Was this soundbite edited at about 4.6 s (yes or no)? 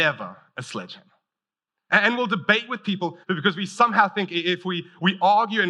no